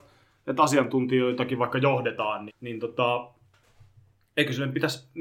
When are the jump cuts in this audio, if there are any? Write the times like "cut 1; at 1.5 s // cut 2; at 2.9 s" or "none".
cut 1; at 2.5 s